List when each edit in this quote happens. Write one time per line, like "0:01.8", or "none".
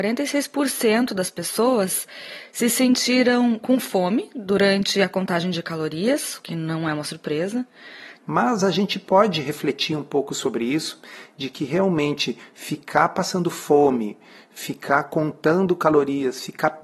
0:08.2